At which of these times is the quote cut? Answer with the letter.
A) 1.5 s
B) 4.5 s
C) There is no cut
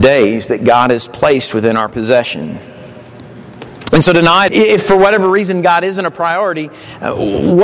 B